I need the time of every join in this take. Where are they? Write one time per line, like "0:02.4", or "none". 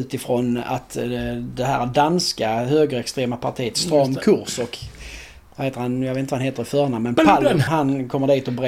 0:07.7